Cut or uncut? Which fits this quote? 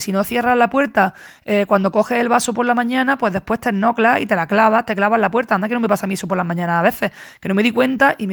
uncut